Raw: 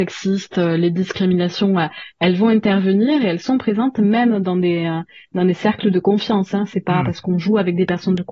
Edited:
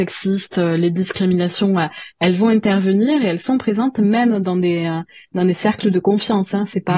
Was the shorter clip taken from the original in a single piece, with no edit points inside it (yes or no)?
yes